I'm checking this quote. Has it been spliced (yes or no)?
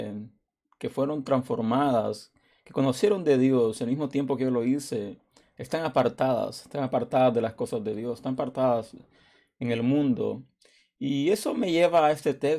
no